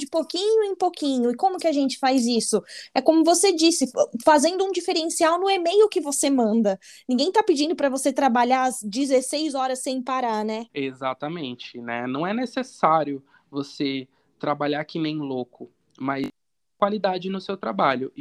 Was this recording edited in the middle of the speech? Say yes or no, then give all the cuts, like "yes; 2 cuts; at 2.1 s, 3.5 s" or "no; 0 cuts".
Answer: yes; 1 cut; at 10.7 s